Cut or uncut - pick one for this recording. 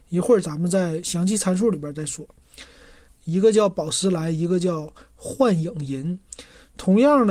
cut